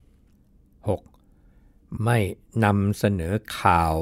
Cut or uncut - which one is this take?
cut